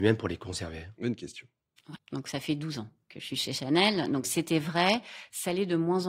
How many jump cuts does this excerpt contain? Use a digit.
1